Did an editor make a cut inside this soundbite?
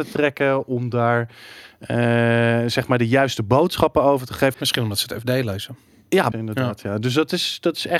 yes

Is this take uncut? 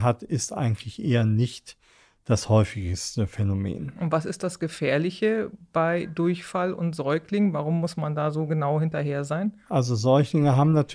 yes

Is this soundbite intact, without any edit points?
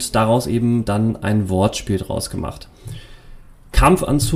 yes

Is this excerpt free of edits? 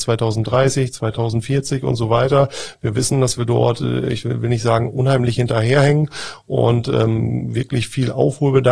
yes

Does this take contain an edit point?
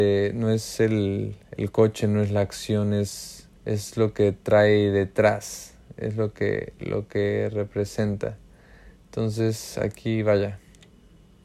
yes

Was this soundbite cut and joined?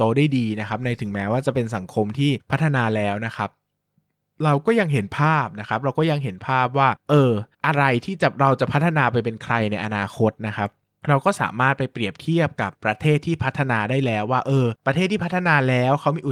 yes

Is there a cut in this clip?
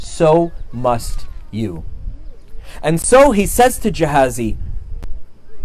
no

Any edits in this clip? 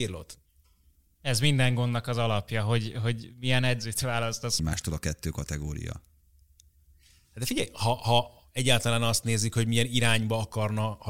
yes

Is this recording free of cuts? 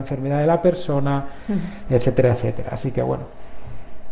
yes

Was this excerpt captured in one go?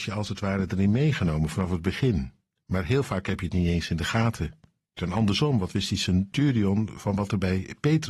no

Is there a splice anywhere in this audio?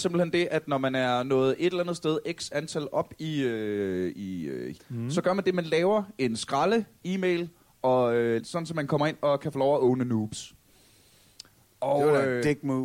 yes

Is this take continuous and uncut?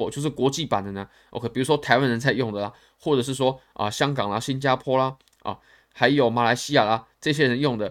yes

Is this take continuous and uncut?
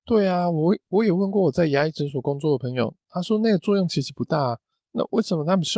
no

